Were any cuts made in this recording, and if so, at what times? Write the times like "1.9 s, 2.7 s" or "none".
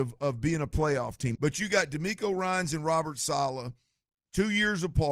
1.3 s